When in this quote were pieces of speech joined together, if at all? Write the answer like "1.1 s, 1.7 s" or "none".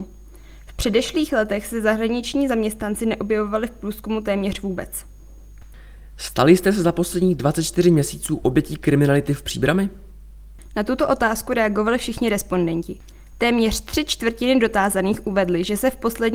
6.1 s